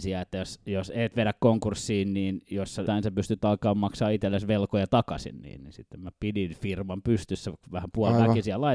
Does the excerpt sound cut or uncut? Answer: cut